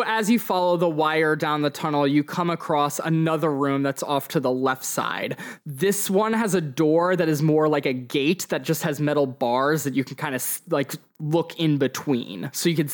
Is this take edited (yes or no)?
no